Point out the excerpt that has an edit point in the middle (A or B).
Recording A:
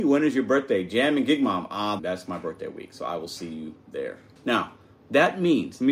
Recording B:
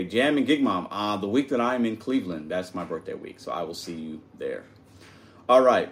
A